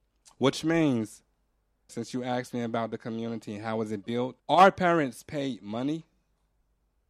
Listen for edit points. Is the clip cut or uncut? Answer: cut